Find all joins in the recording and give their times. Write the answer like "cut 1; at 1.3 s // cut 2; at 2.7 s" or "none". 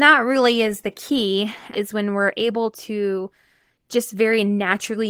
cut 1; at 1.7 s